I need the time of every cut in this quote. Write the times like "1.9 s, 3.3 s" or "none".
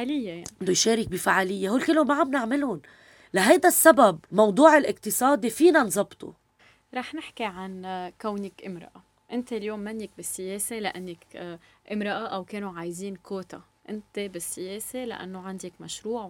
4.2 s